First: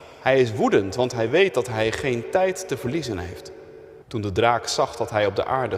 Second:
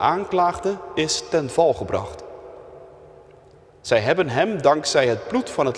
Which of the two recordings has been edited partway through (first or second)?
first